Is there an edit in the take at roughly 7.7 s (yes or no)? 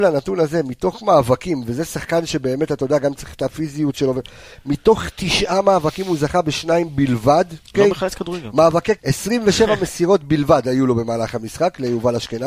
yes